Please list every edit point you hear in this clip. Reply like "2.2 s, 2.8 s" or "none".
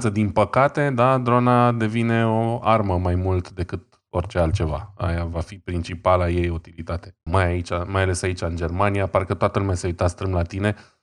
7.3 s